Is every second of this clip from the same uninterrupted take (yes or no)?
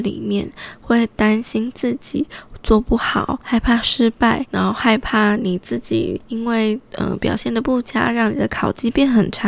no